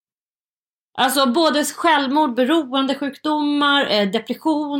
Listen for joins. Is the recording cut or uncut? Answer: uncut